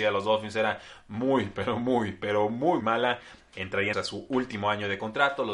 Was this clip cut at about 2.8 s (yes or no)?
yes